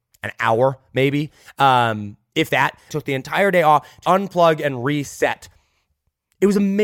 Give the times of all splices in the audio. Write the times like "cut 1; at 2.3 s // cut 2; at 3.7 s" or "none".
cut 1; at 2.9 s // cut 2; at 4.0 s